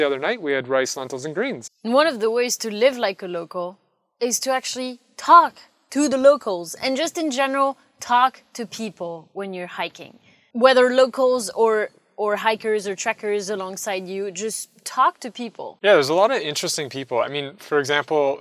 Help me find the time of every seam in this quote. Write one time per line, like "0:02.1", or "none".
0:01.7